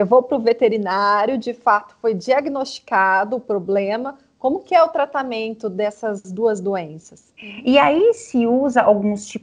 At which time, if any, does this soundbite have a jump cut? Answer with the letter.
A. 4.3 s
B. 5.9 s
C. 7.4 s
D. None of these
C